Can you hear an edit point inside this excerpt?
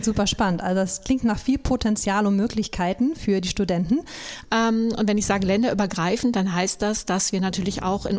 yes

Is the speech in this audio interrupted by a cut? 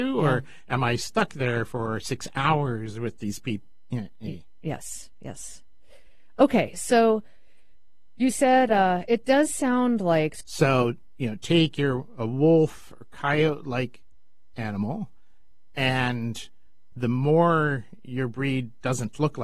yes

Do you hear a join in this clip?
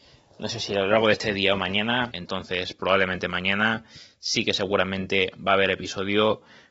yes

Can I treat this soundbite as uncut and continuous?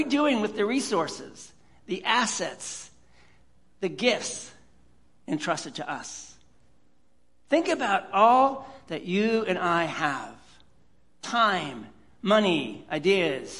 yes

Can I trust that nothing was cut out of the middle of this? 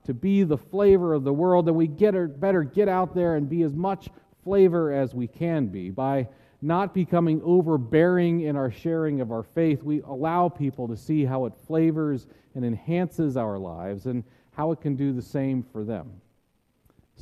no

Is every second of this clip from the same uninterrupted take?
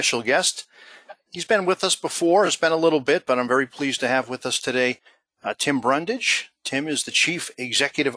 yes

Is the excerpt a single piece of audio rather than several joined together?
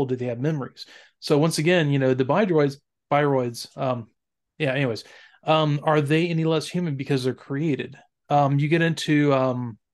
yes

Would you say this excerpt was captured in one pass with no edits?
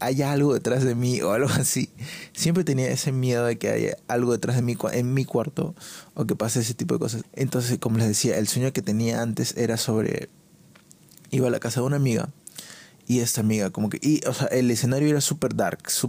no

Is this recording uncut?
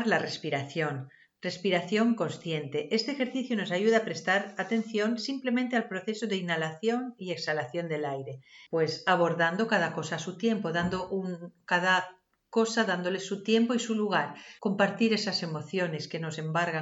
no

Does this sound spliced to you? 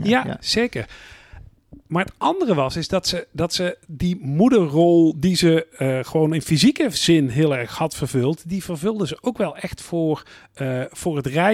no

